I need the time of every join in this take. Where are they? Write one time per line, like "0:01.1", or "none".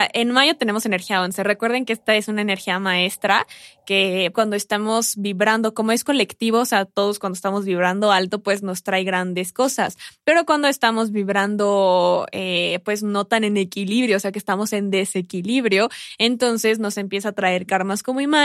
0:04.3